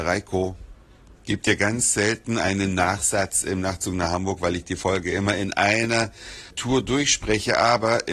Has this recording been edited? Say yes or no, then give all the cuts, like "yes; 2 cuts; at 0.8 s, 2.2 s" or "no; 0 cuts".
yes; 2 cuts; at 1.2 s, 6.5 s